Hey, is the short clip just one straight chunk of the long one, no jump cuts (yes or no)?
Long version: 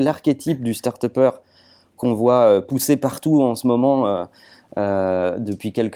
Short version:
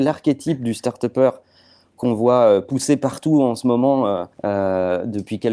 no